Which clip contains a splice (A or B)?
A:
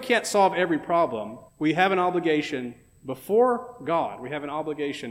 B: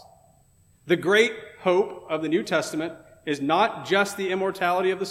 A